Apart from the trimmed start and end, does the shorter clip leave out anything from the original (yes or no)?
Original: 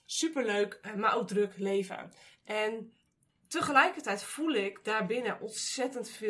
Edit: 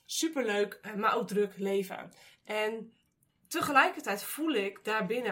no